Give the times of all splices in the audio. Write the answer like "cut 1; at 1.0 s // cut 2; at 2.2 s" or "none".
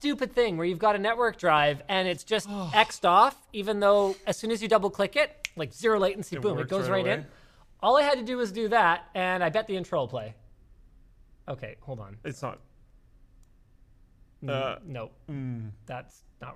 none